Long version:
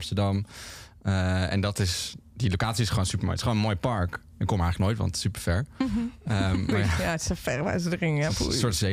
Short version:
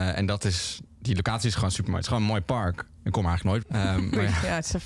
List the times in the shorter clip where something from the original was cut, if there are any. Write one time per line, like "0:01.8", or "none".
0:03.6